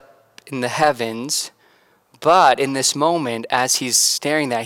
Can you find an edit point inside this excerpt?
no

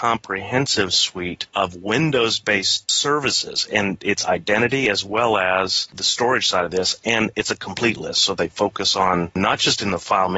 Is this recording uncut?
yes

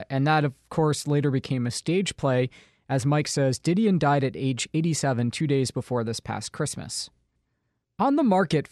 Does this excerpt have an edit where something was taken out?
no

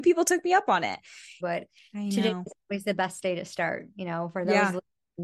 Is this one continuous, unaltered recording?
no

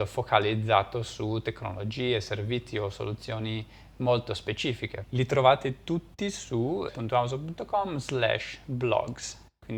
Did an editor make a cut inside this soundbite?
yes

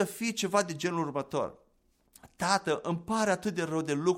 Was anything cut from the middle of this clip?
no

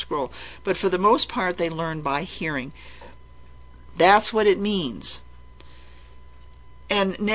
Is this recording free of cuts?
no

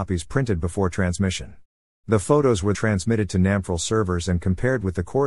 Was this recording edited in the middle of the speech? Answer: yes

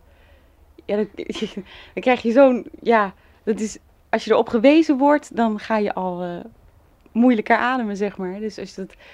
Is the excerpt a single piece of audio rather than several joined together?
yes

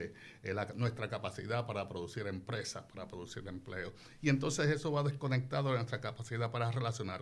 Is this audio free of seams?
yes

